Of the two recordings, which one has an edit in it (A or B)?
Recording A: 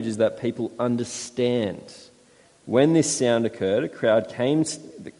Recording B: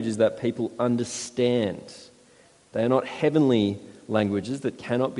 A